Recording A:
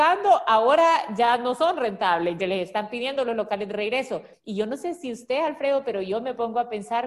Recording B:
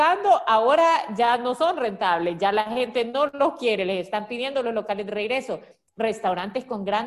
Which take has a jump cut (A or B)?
A